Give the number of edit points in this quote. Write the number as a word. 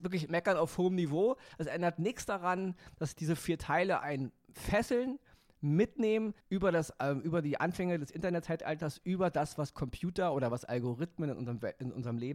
one